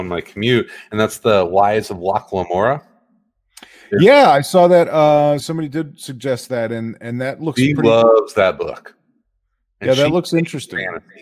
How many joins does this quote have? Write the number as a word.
one